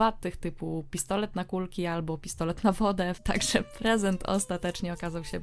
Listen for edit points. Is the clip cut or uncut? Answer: cut